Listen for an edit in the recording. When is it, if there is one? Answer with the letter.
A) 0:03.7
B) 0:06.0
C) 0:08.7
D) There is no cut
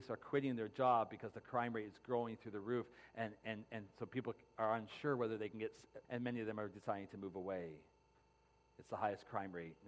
B